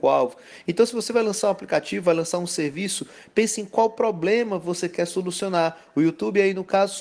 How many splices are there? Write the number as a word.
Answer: zero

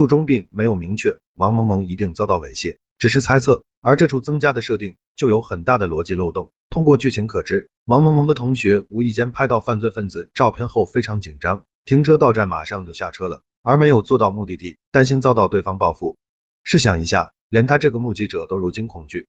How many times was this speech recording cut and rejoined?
one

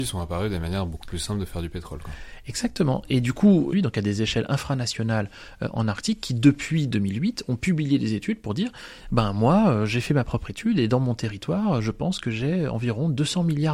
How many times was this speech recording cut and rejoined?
one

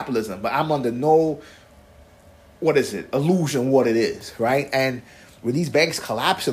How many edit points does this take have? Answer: zero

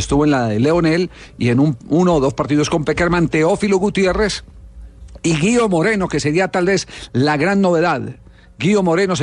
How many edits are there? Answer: zero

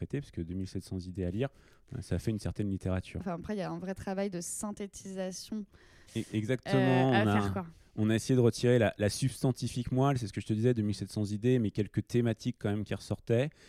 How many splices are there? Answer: two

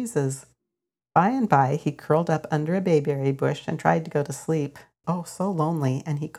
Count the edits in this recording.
two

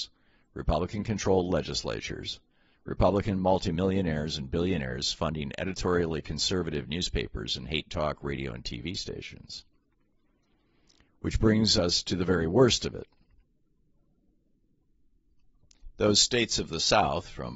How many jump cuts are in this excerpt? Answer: zero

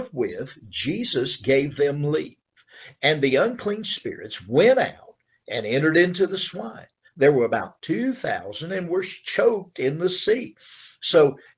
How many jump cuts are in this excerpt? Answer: one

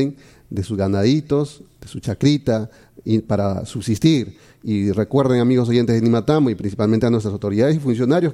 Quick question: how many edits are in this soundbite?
zero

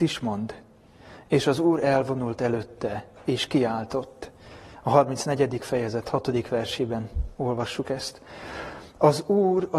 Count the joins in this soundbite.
zero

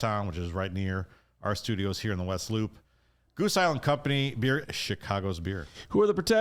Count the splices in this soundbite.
one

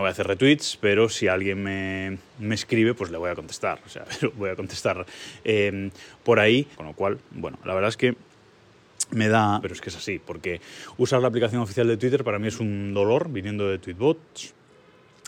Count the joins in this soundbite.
three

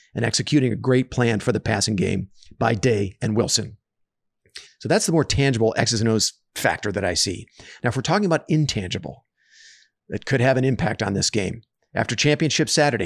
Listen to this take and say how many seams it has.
one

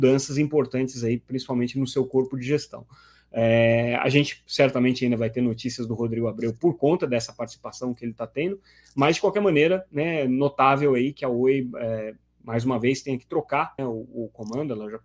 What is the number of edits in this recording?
one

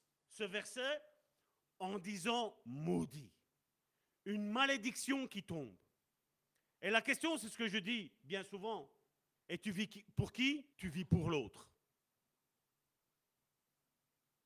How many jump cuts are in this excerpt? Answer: two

